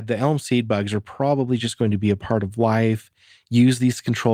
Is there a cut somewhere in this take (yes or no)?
no